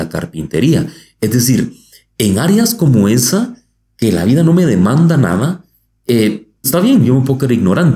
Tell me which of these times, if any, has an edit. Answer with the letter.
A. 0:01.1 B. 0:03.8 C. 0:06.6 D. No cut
C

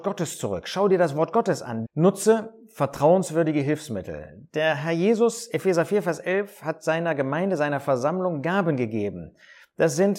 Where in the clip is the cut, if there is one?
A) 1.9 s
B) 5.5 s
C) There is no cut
A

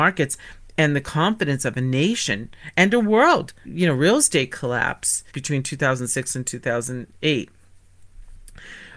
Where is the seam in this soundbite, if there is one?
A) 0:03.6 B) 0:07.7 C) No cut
A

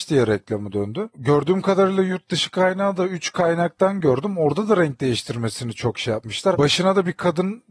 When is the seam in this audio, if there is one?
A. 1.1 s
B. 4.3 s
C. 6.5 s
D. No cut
C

